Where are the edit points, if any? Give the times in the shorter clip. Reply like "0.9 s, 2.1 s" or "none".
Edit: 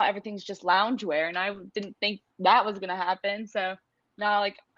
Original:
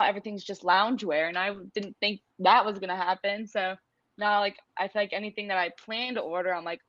none